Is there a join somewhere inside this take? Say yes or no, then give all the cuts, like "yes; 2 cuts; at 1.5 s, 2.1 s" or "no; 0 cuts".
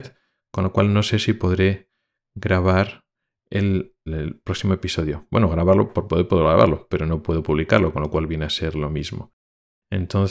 yes; 1 cut; at 4.1 s